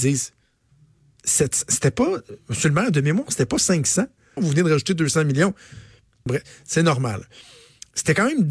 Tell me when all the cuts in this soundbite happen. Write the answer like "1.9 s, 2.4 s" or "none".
4.4 s, 6.3 s